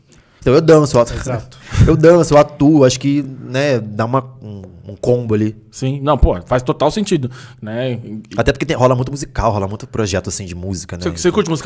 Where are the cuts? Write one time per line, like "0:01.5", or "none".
none